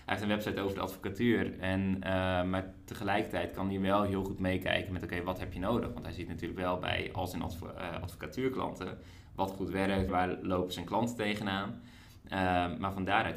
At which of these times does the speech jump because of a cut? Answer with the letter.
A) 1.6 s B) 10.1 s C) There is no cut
B